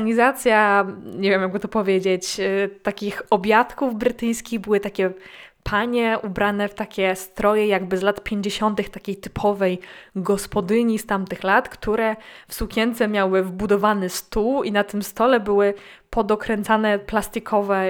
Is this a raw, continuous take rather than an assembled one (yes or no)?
yes